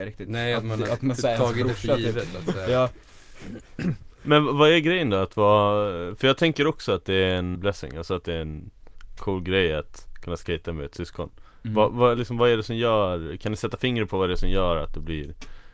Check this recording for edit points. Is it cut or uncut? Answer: cut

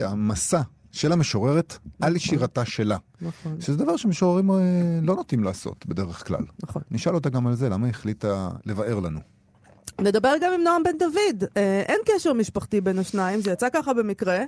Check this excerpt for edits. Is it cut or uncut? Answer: uncut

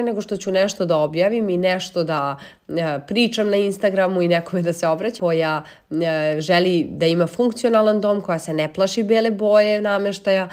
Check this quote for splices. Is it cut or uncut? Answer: cut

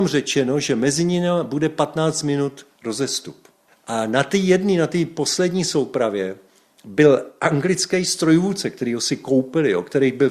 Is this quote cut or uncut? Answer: uncut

